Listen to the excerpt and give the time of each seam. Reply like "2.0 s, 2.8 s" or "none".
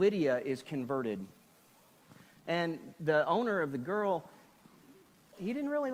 2.4 s